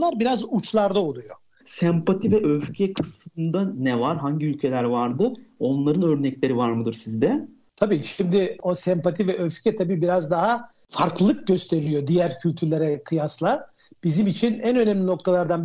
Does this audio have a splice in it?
yes; 1 cut; at 1.6 s

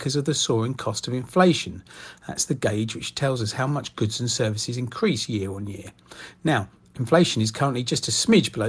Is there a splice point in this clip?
no; 0 cuts

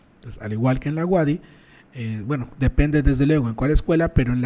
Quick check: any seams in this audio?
no; 0 cuts

